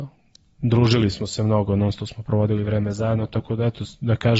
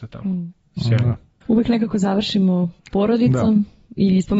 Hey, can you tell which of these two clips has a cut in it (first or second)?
second